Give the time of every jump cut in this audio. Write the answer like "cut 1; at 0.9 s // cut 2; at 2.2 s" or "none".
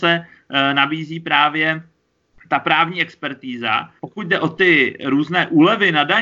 cut 1; at 4.0 s